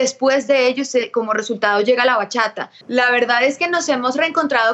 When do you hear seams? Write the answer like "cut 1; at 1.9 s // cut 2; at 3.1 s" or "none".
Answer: cut 1; at 2.8 s